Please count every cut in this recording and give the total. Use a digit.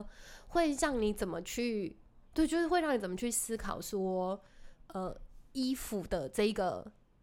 0